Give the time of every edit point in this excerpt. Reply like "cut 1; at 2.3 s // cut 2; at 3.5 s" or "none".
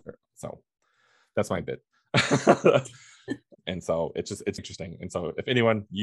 cut 1; at 3.5 s // cut 2; at 4.6 s